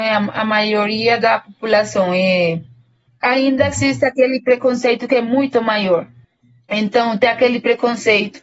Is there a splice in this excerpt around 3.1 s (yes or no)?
yes